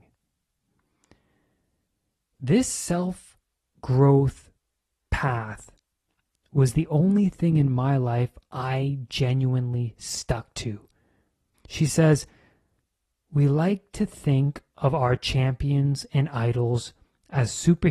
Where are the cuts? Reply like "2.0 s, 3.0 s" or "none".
11.5 s